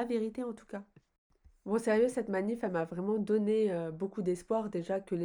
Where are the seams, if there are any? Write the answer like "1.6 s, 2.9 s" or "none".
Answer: none